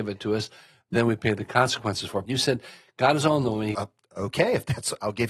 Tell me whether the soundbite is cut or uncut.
cut